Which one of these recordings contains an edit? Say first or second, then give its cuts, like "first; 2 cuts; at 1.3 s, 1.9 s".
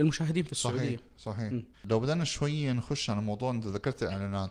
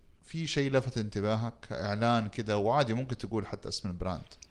first; 1 cut; at 1.7 s